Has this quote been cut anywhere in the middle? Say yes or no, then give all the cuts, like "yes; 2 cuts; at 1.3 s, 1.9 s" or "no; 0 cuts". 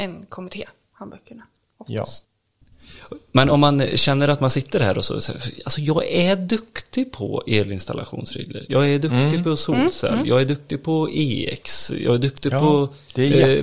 yes; 1 cut; at 8.7 s